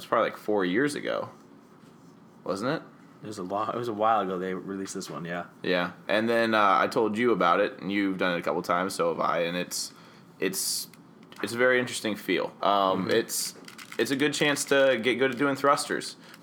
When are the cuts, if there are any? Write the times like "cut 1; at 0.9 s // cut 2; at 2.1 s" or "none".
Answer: cut 1; at 12.6 s